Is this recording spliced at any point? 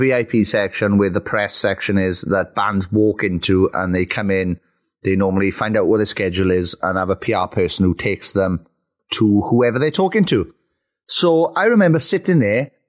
no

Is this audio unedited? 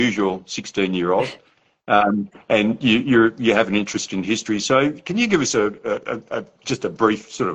yes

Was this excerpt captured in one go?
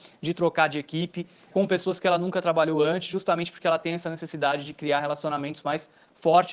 no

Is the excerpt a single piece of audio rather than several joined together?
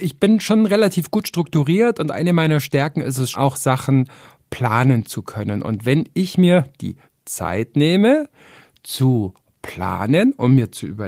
no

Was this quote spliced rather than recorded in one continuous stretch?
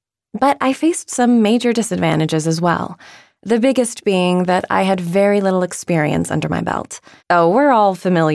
yes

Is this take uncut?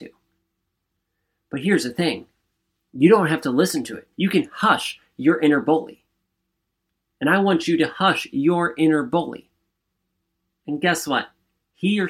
no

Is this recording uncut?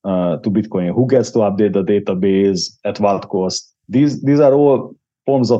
no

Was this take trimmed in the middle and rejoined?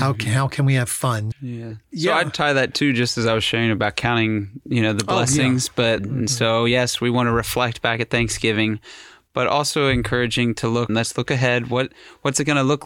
yes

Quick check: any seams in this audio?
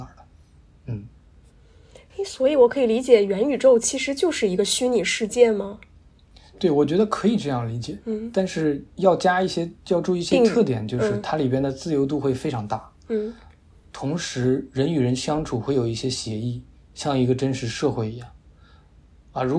no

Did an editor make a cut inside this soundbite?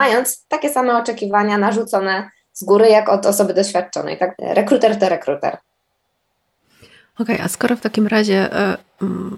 yes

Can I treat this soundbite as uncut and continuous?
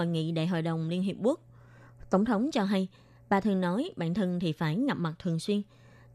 yes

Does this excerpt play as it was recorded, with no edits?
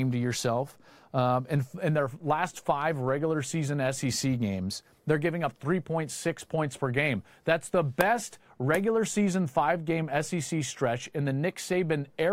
yes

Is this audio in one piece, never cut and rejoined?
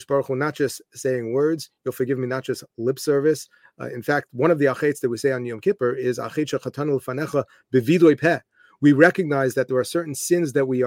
yes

